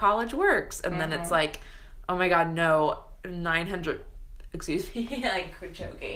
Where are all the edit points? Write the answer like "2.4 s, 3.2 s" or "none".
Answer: none